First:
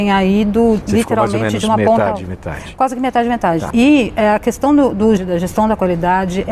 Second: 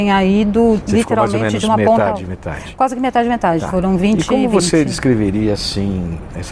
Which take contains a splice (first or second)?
first